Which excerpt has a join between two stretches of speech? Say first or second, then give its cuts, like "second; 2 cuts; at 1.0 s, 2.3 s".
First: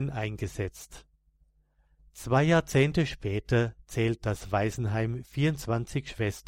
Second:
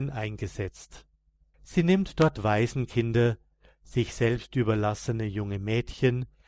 second; 1 cut; at 1.5 s